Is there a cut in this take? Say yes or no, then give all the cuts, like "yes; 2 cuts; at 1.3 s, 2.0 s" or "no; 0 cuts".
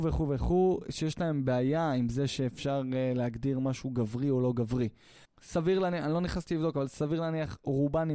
yes; 1 cut; at 5.3 s